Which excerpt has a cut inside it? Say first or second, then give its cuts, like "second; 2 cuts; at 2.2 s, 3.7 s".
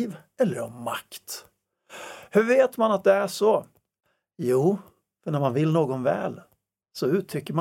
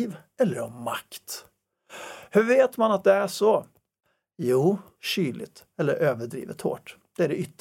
second; 1 cut; at 5.0 s